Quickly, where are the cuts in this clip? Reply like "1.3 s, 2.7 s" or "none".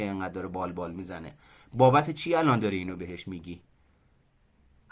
none